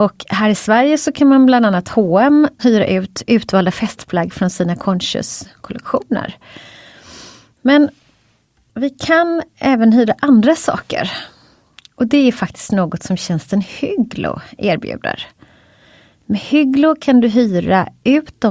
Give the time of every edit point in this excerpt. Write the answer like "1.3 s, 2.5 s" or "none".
2.6 s